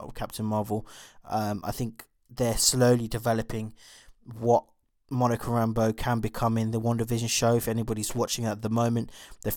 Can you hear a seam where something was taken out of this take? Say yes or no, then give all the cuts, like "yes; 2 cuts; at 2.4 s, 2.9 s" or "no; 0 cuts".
no; 0 cuts